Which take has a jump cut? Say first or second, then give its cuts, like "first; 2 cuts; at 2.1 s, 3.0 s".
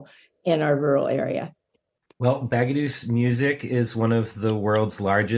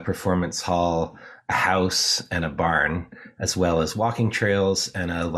first; 1 cut; at 2.1 s